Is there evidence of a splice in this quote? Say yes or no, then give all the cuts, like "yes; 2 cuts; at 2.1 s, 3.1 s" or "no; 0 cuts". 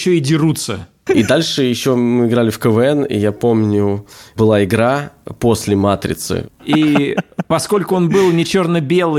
yes; 2 cuts; at 1.1 s, 6.6 s